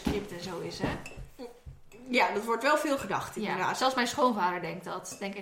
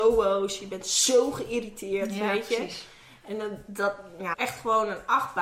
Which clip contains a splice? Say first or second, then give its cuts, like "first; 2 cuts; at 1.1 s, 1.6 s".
second; 1 cut; at 4.3 s